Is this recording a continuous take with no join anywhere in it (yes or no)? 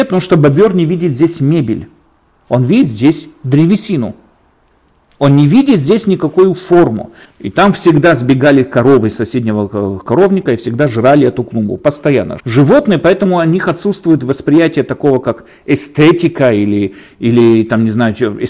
no